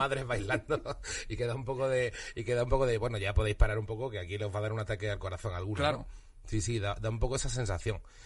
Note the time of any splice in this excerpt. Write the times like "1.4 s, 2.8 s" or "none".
none